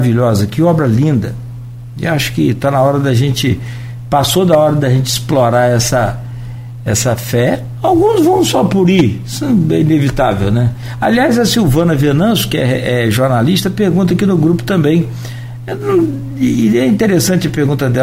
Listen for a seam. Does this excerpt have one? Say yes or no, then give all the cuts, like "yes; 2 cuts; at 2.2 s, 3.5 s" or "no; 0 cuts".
no; 0 cuts